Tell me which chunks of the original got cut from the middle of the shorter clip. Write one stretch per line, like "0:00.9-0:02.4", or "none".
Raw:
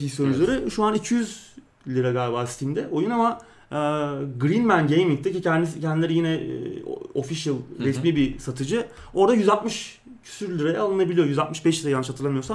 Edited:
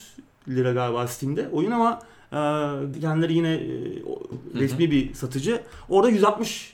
0:04.3-0:05.7
0:07.1-0:07.6